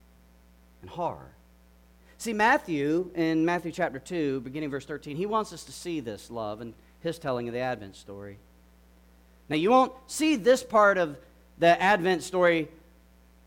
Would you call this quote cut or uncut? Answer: uncut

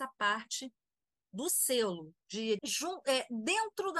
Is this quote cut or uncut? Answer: cut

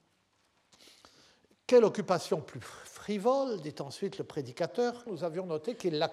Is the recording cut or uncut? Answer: cut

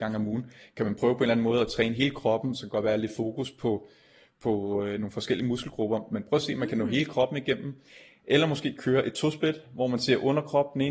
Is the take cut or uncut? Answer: uncut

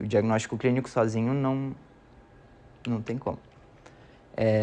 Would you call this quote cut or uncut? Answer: uncut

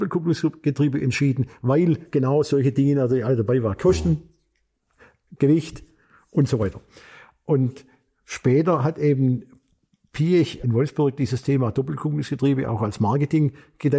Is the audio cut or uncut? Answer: uncut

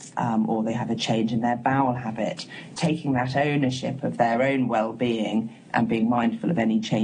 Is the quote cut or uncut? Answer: cut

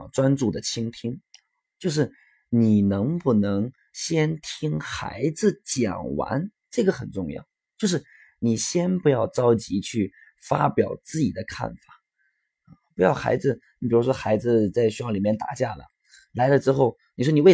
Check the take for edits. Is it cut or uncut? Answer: uncut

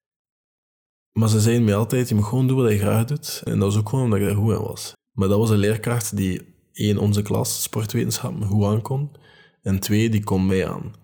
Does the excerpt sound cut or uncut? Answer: cut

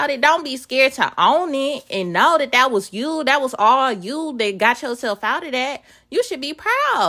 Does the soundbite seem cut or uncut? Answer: uncut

